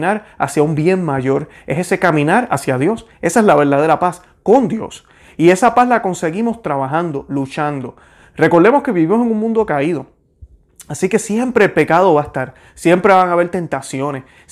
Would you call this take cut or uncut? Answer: uncut